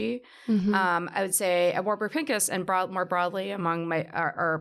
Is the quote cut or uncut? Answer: uncut